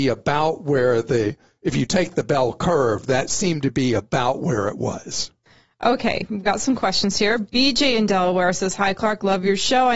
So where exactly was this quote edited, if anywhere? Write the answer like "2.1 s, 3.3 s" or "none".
none